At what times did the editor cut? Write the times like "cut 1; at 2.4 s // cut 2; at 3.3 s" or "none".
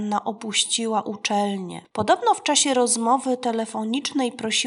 cut 1; at 1.9 s